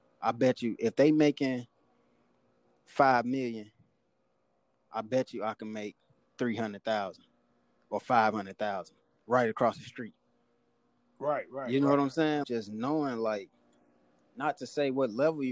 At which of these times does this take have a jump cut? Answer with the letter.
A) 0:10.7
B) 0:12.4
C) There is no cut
B